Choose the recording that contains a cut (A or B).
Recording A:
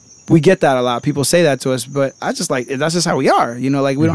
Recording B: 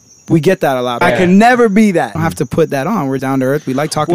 B